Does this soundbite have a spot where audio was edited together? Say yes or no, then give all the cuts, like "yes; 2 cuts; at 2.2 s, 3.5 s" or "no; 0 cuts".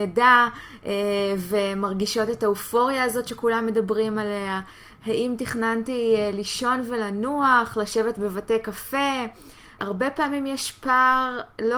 yes; 1 cut; at 9.8 s